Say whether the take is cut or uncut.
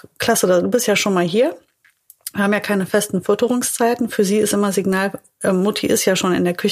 uncut